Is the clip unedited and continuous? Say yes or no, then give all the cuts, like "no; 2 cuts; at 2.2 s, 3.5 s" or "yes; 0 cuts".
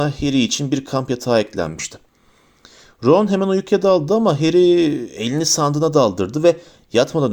yes; 0 cuts